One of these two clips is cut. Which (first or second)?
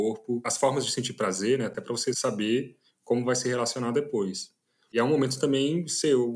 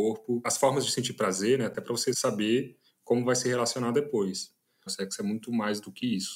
second